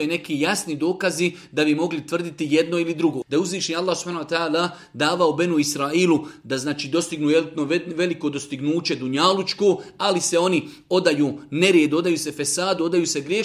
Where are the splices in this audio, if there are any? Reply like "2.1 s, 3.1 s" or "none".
3.2 s